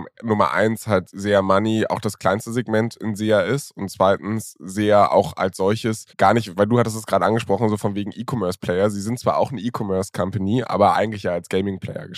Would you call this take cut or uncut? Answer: cut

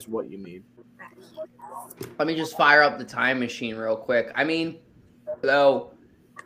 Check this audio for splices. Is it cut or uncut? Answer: cut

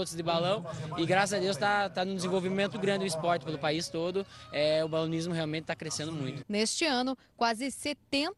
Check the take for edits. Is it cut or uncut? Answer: cut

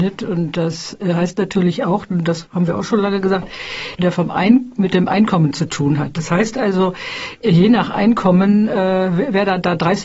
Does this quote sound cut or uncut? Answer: cut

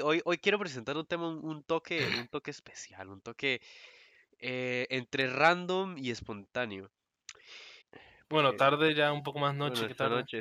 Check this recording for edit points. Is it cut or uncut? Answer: cut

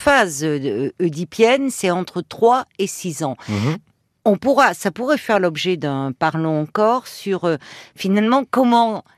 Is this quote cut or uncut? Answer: uncut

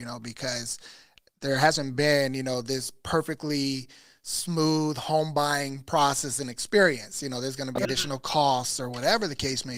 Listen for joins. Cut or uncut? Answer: cut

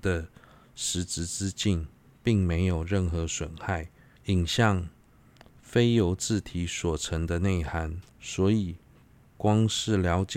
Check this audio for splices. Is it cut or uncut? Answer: cut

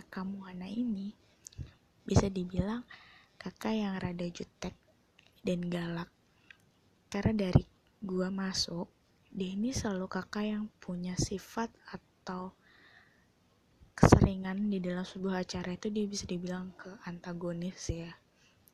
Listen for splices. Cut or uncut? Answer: cut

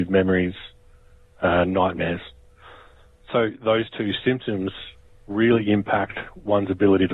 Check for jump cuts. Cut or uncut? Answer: uncut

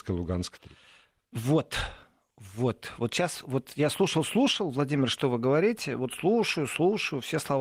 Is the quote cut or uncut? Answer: uncut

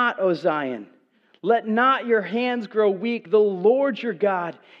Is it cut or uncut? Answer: uncut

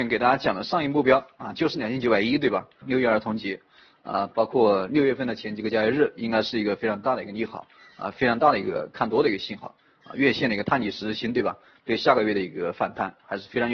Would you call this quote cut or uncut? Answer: cut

